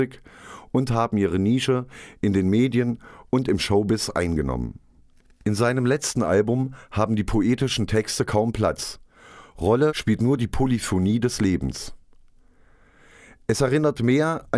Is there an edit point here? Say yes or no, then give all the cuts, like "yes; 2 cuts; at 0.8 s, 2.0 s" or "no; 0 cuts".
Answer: no; 0 cuts